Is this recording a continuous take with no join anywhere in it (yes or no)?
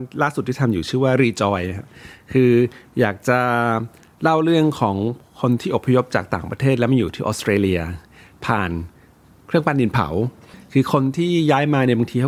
yes